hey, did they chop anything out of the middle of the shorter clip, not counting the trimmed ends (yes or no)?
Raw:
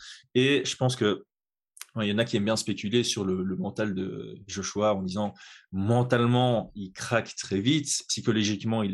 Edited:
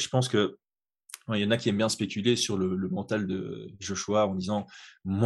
no